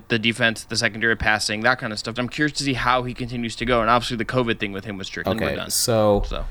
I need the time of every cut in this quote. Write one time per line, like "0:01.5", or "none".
0:02.2
0:05.2